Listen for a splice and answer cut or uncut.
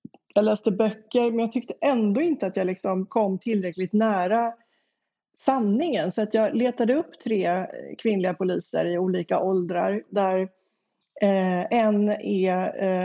uncut